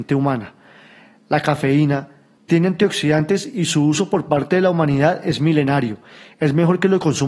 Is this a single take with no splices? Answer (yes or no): no